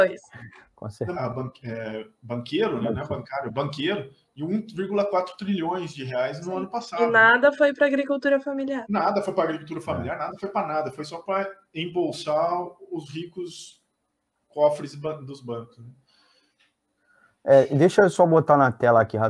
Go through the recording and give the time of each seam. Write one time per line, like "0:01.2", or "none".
0:01.1